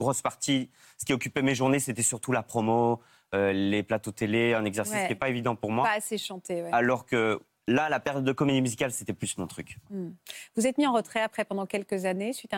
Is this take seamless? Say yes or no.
yes